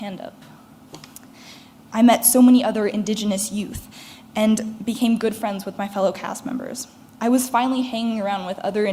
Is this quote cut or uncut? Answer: cut